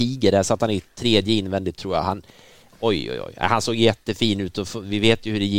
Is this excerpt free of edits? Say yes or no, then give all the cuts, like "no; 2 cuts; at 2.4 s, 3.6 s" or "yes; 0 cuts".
yes; 0 cuts